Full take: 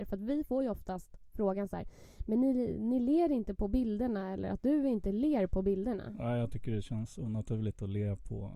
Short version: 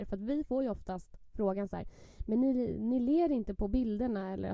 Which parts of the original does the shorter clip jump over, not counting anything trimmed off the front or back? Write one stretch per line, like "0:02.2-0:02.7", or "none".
none

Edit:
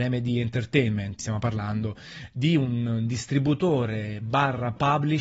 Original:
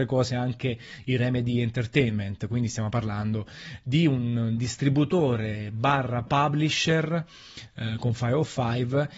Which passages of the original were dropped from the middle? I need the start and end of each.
0:02.4-0:02.7

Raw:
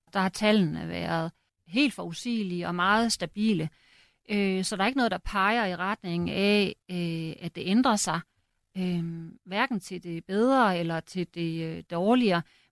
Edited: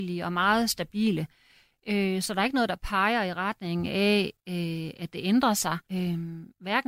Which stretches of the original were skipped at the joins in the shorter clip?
0:08.3-0:08.7

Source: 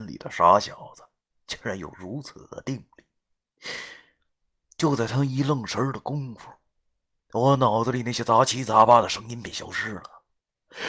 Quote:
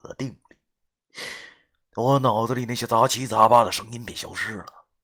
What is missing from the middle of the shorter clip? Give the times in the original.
0:04.3-0:07.2

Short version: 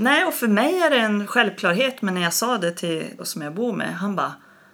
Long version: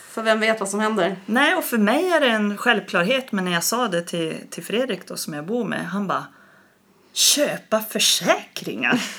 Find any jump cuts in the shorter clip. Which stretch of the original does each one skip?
0:04.5-0:05.1

